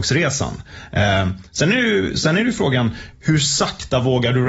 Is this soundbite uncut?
no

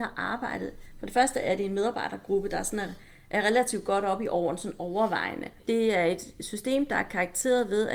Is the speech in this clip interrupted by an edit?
yes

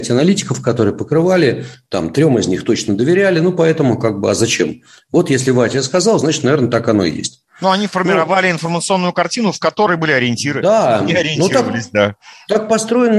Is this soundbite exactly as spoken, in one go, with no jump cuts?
yes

